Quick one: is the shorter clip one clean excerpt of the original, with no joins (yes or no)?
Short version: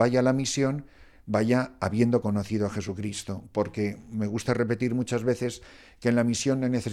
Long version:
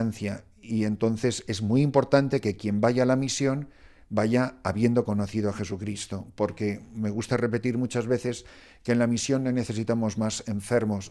yes